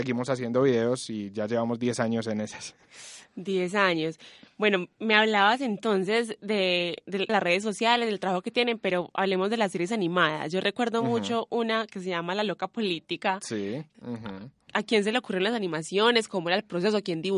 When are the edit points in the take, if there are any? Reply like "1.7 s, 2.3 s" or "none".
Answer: 7.3 s, 13.9 s